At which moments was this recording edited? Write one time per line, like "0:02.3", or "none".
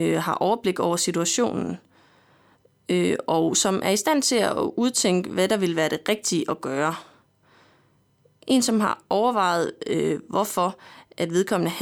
none